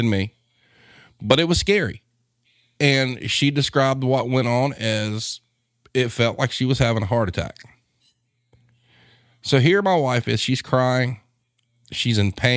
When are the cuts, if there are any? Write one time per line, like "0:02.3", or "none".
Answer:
none